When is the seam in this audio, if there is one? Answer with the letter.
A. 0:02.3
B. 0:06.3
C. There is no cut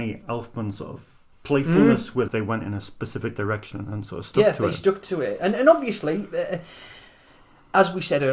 A